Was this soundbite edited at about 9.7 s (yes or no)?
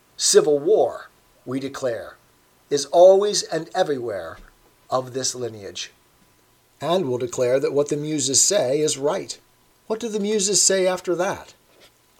yes